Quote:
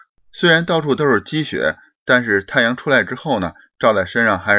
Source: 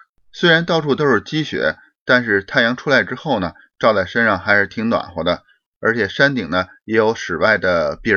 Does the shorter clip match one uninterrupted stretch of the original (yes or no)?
yes